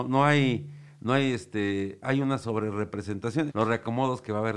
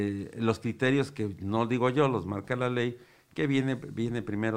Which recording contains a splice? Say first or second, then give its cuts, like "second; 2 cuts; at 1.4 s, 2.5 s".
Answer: first; 1 cut; at 3.5 s